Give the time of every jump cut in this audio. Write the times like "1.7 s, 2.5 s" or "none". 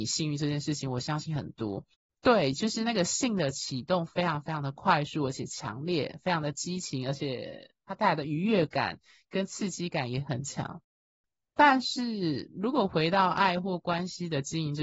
2.1 s